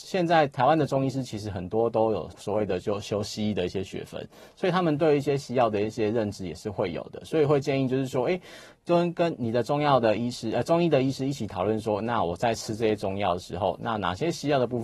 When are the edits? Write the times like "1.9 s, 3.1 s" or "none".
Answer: 2.3 s

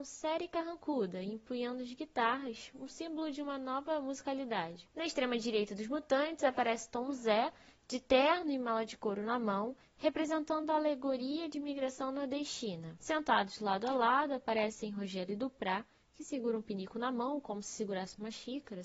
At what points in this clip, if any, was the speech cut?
4.9 s

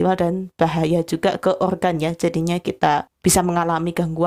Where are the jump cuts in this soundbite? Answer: none

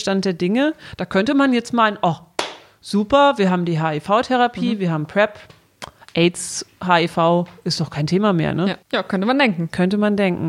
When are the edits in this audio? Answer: none

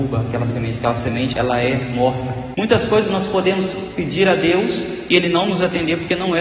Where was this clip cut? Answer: 1.3 s, 2.5 s

